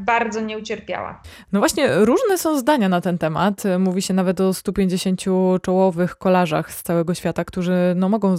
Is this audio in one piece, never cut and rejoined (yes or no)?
yes